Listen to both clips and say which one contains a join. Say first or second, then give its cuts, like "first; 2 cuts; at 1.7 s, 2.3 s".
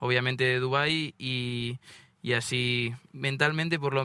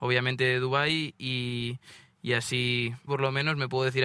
second; 1 cut; at 3.1 s